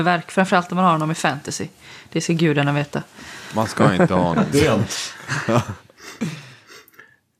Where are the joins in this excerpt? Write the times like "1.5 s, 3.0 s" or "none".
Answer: 4.5 s